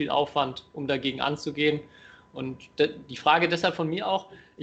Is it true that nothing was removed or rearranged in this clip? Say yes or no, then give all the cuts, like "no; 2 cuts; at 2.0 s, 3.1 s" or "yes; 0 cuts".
yes; 0 cuts